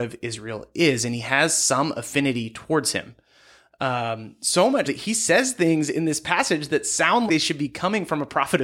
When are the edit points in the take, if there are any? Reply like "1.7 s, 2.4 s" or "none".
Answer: 4.8 s, 7.3 s